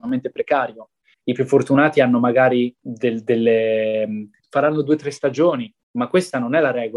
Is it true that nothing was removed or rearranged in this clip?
no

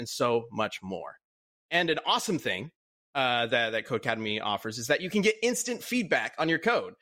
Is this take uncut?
yes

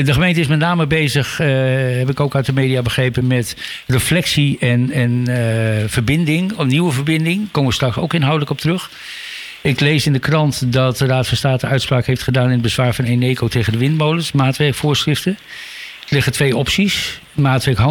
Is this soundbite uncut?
yes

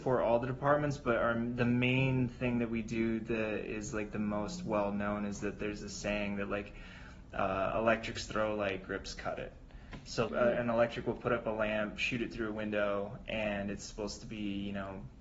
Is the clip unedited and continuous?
no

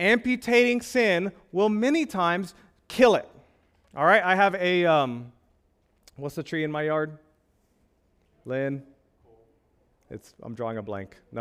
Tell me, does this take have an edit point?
no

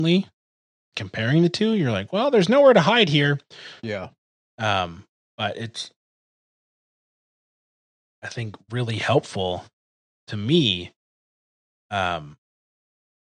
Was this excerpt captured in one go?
no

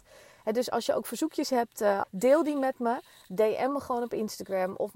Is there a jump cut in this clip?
yes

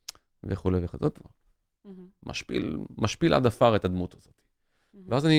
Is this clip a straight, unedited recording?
no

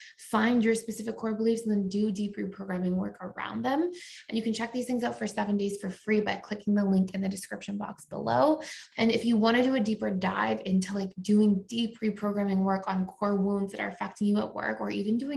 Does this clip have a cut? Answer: yes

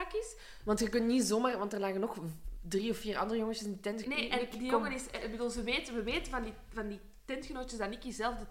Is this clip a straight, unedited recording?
no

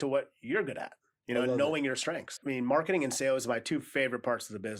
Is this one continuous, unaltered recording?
no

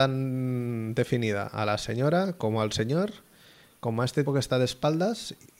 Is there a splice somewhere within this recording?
yes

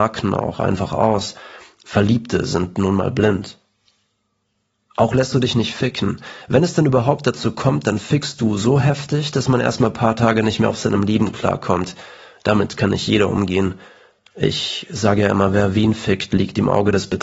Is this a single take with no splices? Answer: yes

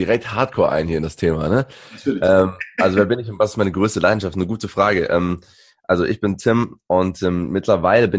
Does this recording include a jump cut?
no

